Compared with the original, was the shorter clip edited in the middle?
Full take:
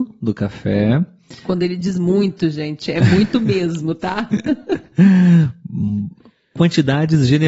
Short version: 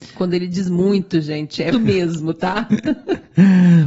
yes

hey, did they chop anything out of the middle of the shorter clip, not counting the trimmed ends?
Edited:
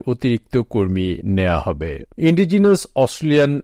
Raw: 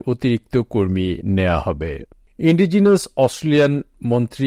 yes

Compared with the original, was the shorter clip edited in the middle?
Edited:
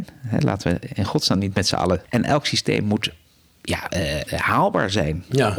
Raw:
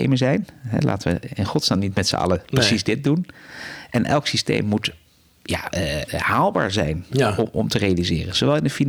yes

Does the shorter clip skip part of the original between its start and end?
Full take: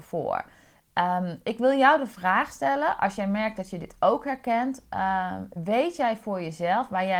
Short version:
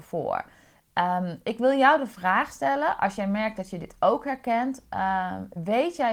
no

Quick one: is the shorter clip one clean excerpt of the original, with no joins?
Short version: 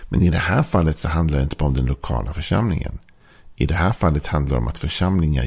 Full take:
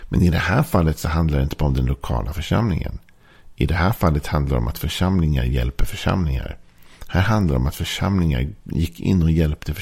yes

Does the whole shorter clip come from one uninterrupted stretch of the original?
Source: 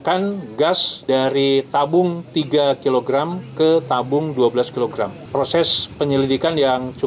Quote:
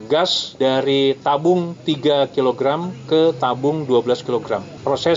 yes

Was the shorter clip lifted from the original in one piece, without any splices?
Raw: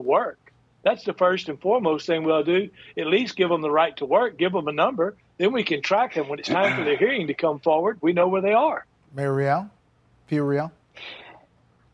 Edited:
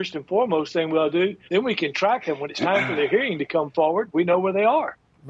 no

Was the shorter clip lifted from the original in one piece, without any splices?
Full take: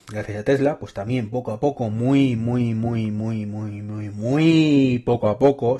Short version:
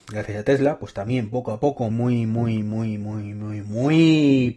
no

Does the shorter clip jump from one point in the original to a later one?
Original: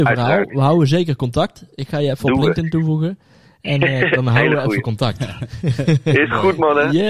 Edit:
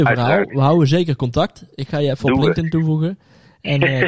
no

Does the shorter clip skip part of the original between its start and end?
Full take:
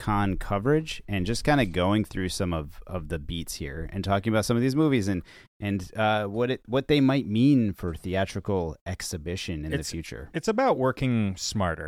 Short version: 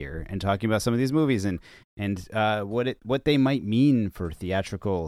no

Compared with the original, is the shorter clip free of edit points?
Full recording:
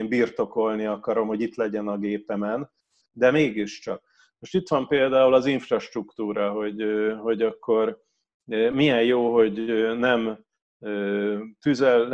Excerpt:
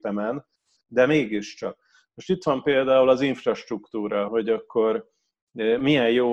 no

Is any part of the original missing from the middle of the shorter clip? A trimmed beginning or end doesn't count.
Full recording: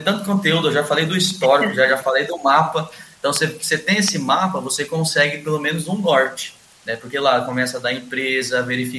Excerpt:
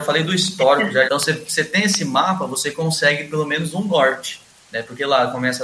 yes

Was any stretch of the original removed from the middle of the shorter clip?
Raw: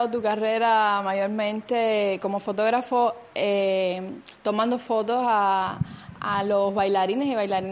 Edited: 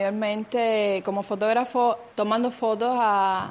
yes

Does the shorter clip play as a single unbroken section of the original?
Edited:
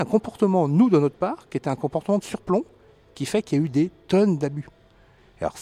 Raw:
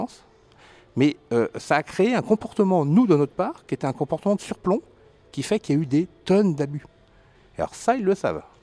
yes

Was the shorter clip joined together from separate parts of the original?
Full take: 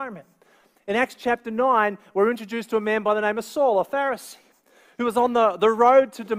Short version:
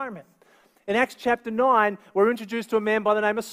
no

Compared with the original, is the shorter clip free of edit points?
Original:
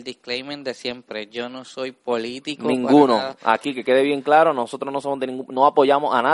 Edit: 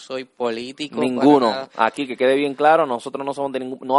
yes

